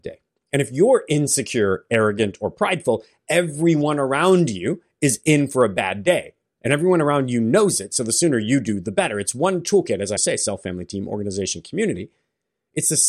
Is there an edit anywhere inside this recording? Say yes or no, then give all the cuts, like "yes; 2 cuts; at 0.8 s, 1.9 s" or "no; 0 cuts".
yes; 1 cut; at 10.2 s